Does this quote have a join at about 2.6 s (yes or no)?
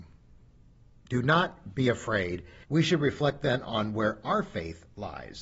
yes